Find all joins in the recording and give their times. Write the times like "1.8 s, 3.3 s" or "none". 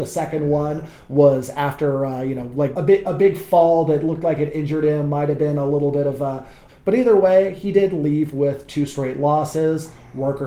2.7 s, 6.7 s